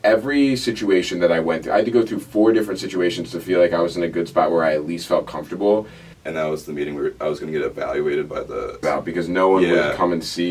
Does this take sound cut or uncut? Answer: cut